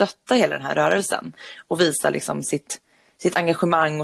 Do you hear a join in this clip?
no; 0 cuts

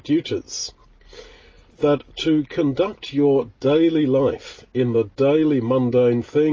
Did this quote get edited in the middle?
yes; 1 cut; at 1.7 s

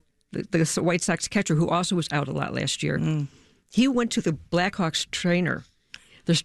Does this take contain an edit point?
no; 0 cuts

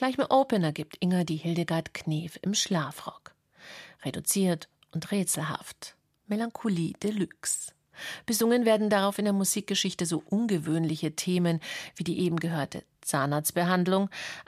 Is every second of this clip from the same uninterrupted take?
yes; 0 cuts

